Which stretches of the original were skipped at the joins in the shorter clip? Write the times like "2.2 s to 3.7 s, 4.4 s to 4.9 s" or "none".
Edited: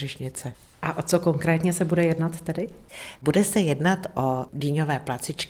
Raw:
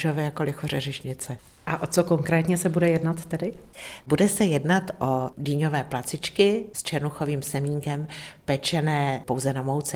none